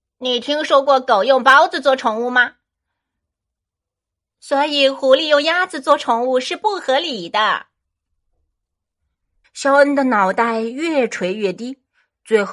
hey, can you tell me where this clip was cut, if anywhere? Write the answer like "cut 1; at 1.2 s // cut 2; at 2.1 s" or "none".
cut 1; at 9.4 s